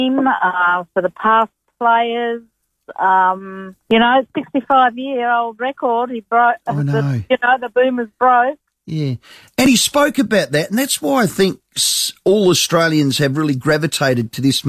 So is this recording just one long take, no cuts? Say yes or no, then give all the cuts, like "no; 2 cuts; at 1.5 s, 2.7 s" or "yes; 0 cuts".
yes; 0 cuts